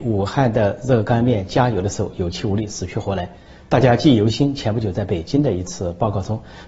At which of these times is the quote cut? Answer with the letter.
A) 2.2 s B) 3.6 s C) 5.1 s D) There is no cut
B